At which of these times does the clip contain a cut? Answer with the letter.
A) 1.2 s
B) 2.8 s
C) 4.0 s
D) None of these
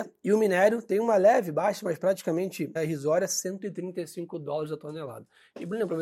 B